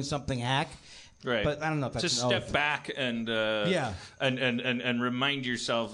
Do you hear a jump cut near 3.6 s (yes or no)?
no